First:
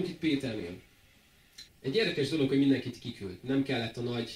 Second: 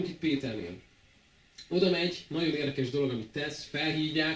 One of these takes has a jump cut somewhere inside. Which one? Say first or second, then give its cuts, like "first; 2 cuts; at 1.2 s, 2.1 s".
first; 1 cut; at 1.7 s